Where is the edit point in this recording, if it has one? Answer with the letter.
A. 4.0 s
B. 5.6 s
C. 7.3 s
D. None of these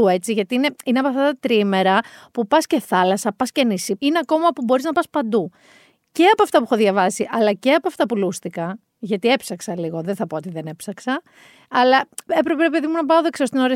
A